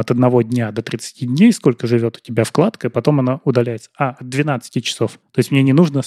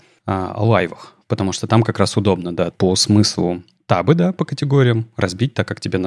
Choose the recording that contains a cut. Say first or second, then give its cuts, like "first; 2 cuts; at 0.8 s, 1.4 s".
second; 1 cut; at 2.7 s